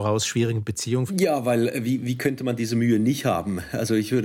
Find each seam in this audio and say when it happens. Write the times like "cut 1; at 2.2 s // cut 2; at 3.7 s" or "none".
cut 1; at 1.1 s